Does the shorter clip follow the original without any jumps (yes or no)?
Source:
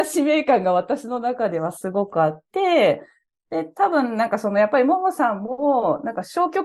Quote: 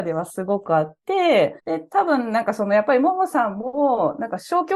no